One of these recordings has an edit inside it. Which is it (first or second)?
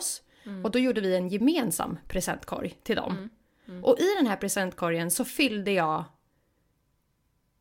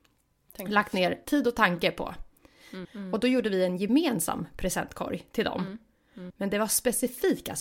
second